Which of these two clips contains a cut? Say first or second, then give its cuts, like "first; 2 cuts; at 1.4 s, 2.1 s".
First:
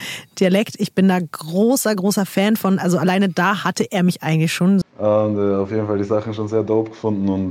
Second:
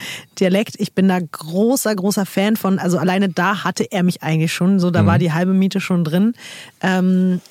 first; 1 cut; at 4.8 s